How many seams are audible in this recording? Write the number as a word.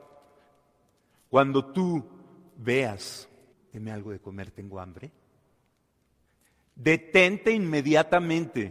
one